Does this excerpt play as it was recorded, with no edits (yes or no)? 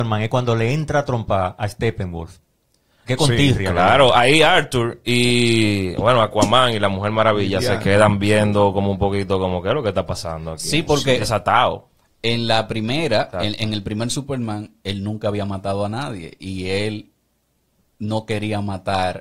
no